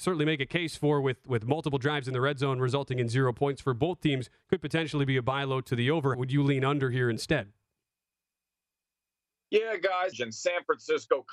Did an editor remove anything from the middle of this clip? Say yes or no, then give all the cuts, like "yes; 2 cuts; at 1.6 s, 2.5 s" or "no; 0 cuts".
yes; 2 cuts; at 6.1 s, 10.1 s